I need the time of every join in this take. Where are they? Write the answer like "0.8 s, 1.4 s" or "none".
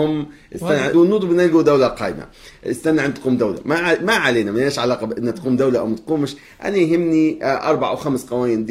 0.9 s